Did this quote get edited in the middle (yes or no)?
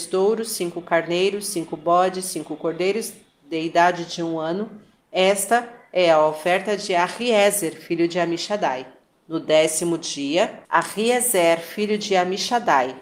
yes